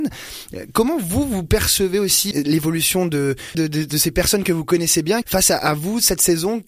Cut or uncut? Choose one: cut